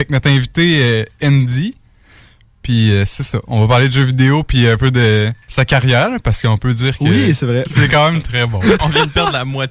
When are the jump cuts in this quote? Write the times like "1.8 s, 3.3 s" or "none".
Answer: 5.4 s, 7.7 s